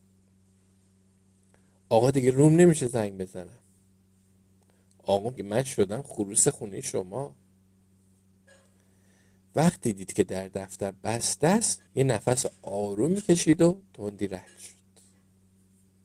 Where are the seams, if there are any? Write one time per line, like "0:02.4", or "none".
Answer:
0:05.4
0:11.9